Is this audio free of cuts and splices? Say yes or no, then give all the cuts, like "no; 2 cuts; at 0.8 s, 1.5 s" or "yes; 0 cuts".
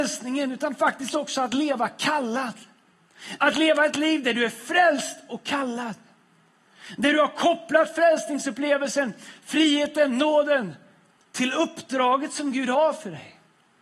yes; 0 cuts